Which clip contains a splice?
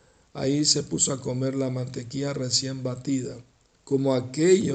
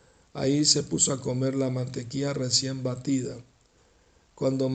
first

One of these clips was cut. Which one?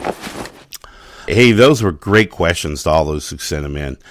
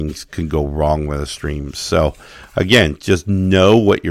first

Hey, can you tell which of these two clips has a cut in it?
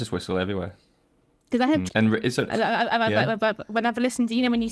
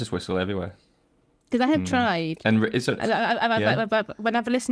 first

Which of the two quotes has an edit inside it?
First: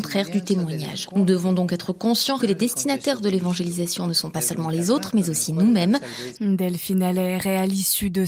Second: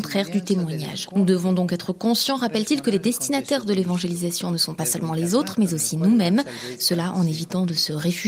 first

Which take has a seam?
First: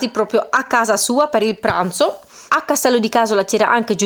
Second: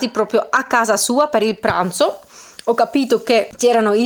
first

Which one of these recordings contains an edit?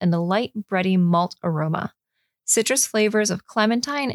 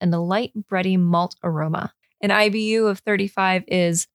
second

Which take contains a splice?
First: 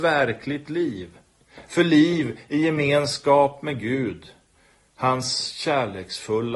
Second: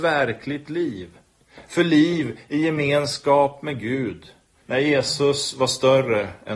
second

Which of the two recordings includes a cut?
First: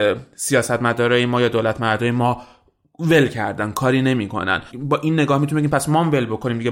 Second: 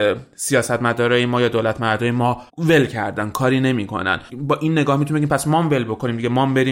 second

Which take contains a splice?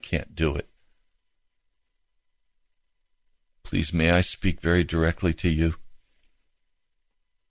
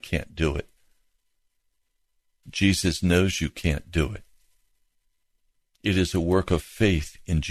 second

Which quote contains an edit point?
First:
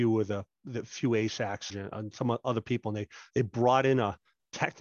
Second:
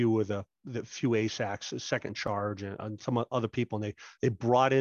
first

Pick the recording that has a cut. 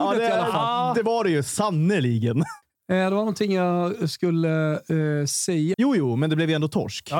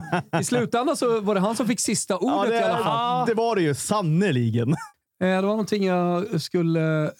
first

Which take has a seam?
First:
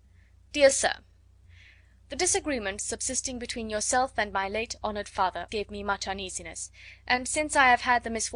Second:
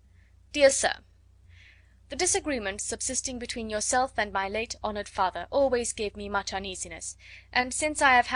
first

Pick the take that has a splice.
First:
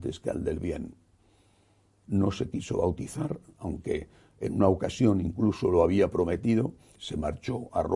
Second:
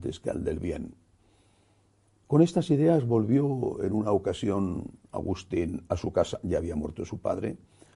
first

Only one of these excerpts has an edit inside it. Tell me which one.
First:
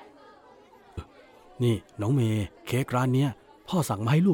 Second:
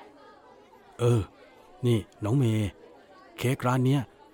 first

